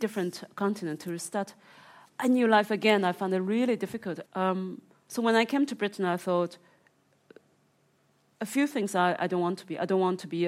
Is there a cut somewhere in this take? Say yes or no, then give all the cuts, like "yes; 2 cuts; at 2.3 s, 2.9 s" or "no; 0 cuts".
yes; 1 cut; at 4.3 s